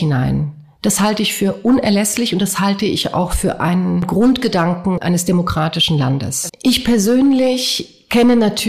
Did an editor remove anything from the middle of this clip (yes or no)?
yes